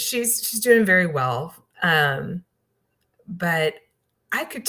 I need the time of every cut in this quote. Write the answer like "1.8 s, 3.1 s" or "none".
1.7 s